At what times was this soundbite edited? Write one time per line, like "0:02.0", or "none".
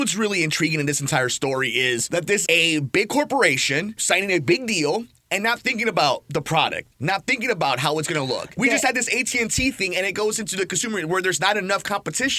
0:02.5